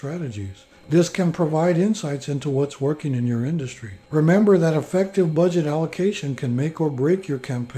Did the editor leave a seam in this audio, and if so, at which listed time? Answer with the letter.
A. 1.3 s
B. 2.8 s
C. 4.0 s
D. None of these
C